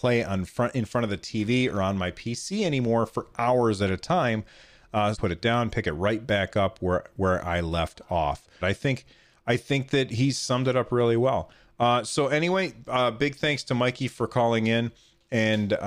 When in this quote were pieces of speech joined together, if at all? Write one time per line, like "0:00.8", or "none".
0:05.1
0:08.6